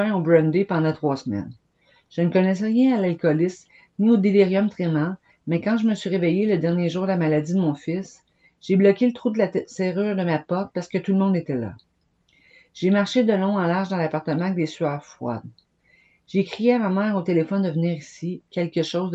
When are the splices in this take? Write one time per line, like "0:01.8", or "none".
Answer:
none